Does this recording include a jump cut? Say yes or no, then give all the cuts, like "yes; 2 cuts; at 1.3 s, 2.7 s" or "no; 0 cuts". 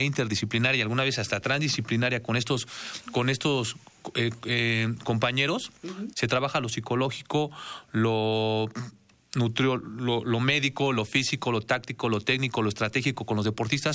yes; 2 cuts; at 6.1 s, 10.2 s